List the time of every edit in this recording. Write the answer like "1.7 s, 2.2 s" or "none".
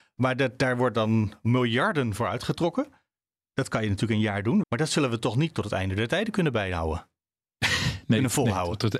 4.6 s